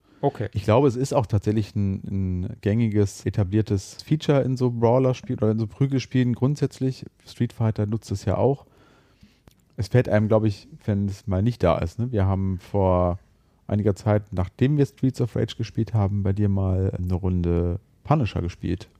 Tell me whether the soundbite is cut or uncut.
cut